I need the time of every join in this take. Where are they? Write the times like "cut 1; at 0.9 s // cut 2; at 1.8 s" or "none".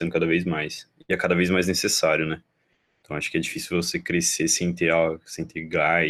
none

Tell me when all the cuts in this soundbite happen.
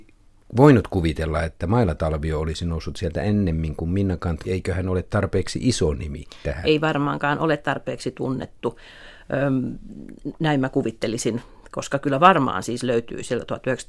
cut 1; at 4.4 s

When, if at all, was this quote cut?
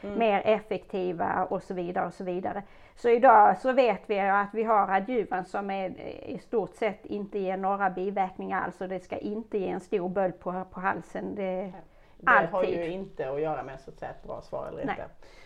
cut 1; at 5.5 s // cut 2; at 12.2 s

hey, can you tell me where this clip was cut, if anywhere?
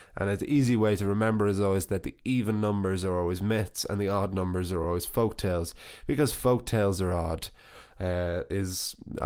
none

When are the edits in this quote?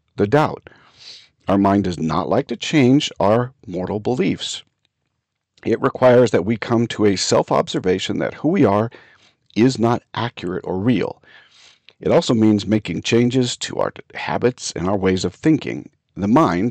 none

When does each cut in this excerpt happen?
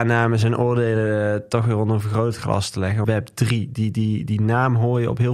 cut 1; at 3.0 s

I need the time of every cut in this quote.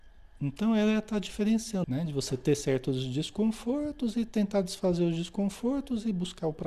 cut 1; at 1.8 s

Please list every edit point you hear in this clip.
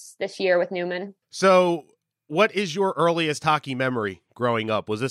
cut 1; at 1.2 s

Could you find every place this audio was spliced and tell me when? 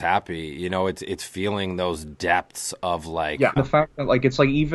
cut 1; at 3.6 s

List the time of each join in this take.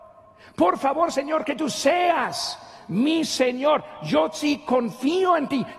none

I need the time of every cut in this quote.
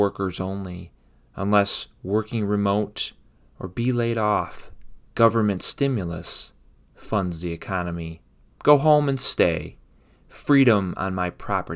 cut 1; at 5.1 s // cut 2; at 8.5 s

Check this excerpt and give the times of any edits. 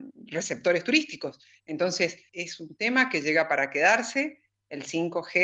cut 1; at 2.3 s

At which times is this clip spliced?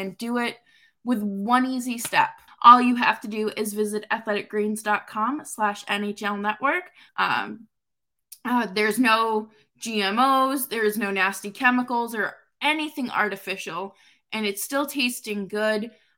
cut 1; at 2.5 s // cut 2; at 7.1 s

